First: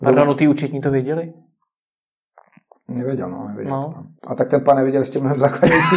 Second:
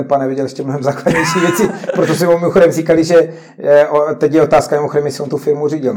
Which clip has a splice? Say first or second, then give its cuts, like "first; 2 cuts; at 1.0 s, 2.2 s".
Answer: first; 1 cut; at 4.2 s